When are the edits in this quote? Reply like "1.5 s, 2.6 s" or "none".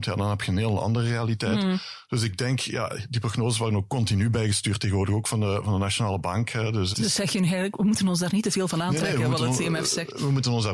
6.9 s

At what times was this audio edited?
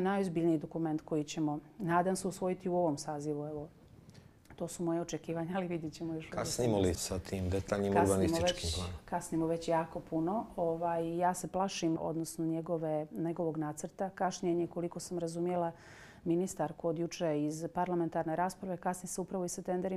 7.0 s, 12.0 s

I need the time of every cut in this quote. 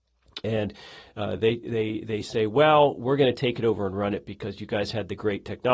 none

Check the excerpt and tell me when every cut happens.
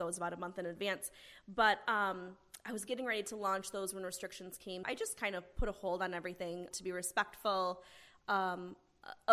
4.8 s, 6.7 s

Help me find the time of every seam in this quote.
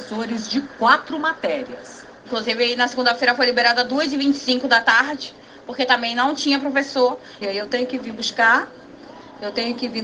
7.4 s

